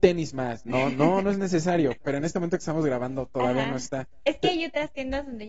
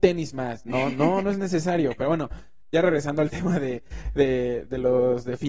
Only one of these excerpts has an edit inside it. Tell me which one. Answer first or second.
first